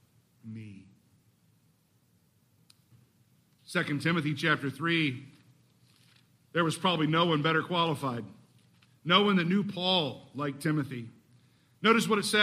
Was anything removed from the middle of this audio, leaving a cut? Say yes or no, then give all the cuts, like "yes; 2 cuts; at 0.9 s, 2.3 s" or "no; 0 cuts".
no; 0 cuts